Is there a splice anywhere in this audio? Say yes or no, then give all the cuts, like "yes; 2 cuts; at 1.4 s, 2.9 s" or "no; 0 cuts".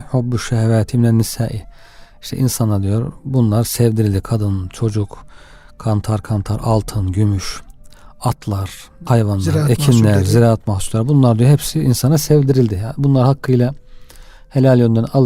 yes; 1 cut; at 9.1 s